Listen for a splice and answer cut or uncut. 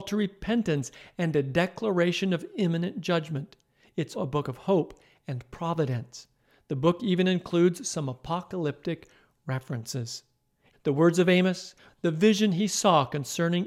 cut